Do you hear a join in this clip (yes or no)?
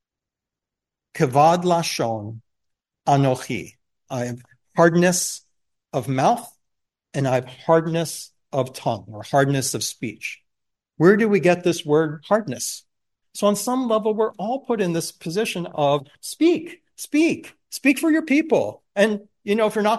yes